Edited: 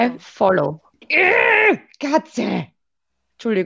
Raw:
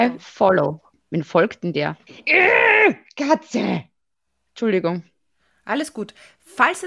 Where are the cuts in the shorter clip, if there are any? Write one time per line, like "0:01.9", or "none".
0:01.0